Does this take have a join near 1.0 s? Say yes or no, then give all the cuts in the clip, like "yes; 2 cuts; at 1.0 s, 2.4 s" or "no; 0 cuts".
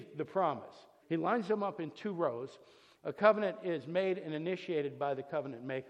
yes; 2 cuts; at 1.0 s, 3.0 s